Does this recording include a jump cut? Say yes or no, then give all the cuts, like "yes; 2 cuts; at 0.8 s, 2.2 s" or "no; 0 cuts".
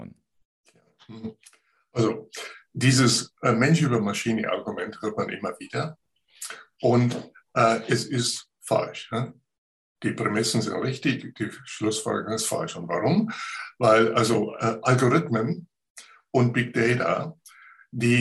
no; 0 cuts